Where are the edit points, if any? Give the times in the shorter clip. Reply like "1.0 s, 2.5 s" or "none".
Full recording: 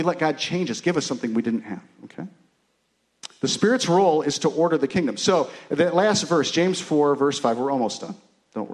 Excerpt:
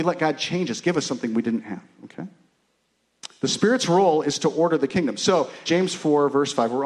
5.7 s